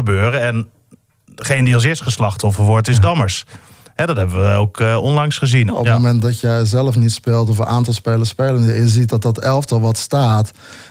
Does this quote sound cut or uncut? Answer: cut